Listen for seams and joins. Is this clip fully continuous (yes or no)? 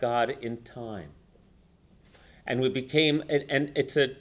yes